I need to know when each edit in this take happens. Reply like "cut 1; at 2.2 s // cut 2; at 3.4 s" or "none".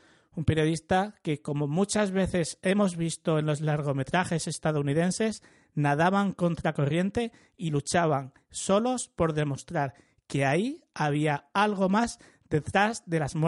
none